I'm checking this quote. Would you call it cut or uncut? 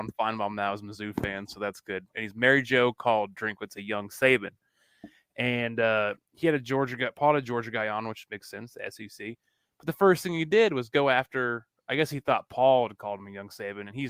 uncut